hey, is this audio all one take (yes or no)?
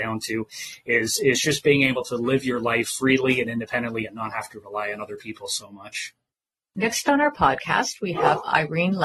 yes